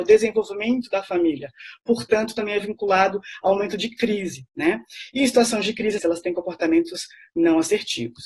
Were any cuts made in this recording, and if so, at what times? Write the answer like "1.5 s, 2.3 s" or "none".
6.0 s

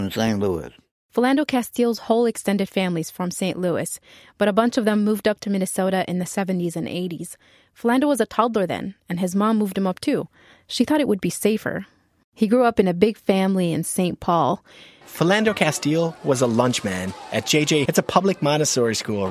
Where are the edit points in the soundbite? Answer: 15.0 s, 17.8 s

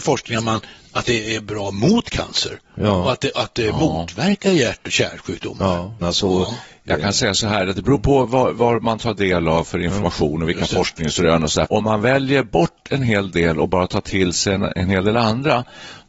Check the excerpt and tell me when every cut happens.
6.0 s, 11.7 s

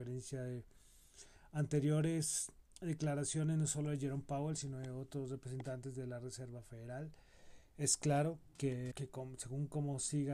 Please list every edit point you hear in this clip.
8.9 s

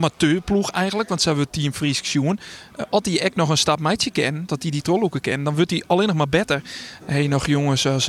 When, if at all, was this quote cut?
4.5 s, 7.0 s

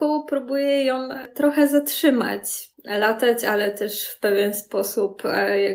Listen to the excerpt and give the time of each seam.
2.7 s

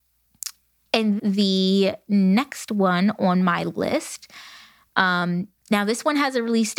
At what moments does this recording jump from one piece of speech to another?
1.2 s

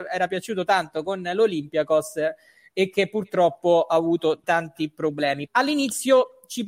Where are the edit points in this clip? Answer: 4.4 s, 5.5 s

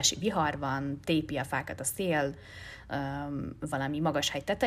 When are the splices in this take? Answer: none

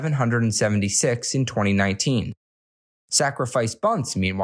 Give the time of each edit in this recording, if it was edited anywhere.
2.9 s

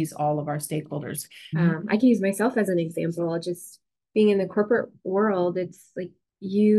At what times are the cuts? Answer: 1.5 s

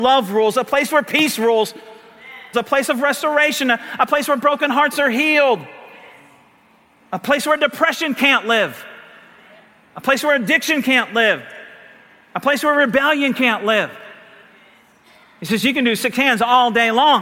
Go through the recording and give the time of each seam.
2.5 s

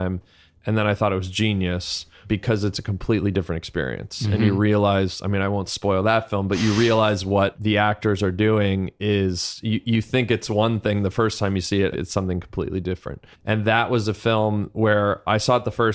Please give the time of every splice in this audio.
11.9 s, 13.3 s

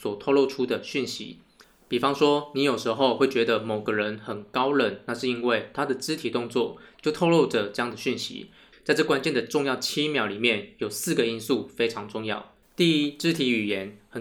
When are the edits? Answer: 8.7 s, 12.6 s

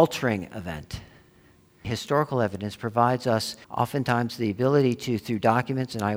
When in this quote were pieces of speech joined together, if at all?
1.8 s, 3.6 s

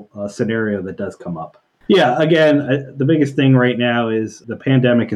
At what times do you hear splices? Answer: 1.9 s

